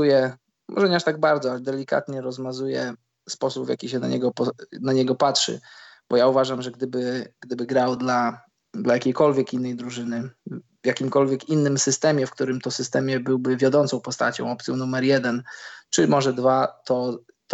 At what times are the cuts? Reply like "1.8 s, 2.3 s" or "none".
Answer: none